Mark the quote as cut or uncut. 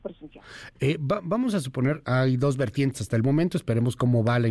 cut